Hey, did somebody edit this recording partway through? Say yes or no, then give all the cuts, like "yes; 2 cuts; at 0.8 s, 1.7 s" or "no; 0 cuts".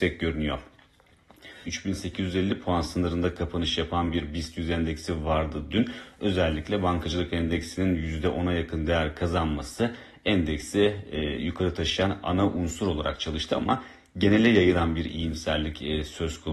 yes; 1 cut; at 1.6 s